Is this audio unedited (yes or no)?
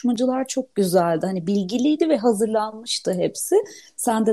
yes